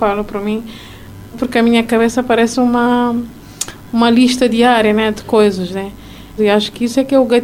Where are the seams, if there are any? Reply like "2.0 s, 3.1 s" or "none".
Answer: 1.3 s, 6.4 s